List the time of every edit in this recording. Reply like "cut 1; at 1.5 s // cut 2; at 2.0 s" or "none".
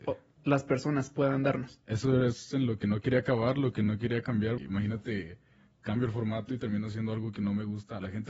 cut 1; at 4.6 s